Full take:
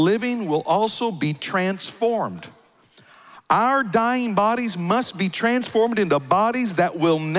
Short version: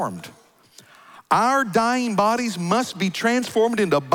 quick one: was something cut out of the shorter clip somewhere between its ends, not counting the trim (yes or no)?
no